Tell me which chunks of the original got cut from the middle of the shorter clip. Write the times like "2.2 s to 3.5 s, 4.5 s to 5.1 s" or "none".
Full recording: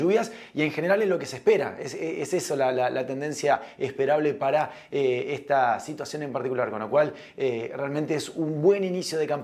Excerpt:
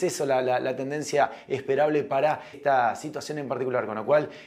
4.8 s to 5.4 s

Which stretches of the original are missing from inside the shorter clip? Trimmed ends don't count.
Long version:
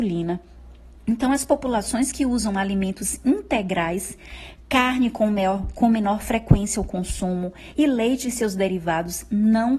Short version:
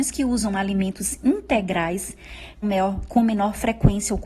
4.6 s to 5.3 s

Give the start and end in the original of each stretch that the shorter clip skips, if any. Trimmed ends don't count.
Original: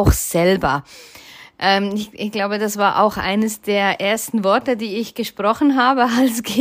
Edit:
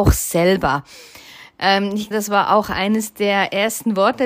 2.1 s to 2.6 s

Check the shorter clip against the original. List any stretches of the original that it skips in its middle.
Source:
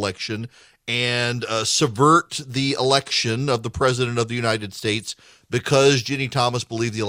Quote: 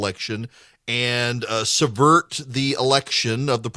none

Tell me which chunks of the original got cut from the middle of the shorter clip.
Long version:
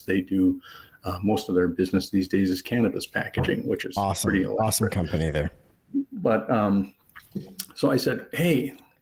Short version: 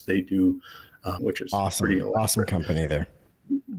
1.2 s to 3.6 s

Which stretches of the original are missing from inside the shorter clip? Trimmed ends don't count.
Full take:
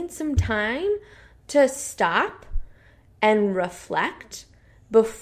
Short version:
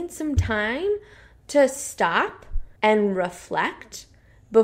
2.8 s to 3.1 s

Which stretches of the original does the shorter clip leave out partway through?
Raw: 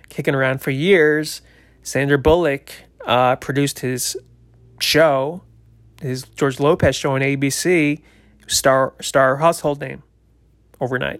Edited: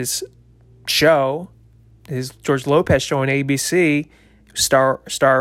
none

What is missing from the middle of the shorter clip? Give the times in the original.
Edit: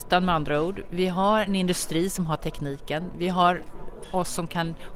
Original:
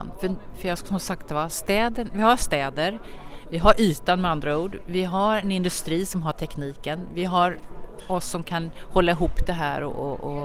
none

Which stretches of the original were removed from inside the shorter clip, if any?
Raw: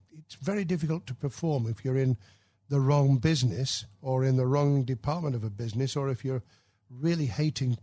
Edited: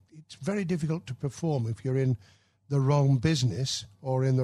none

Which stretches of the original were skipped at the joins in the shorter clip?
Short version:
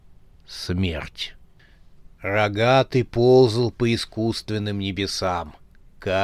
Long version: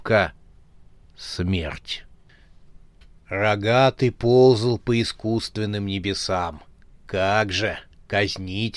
2.8 s to 3.2 s

